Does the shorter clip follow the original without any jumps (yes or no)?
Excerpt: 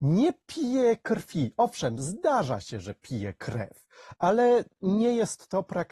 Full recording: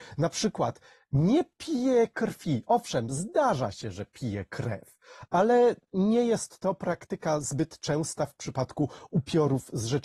yes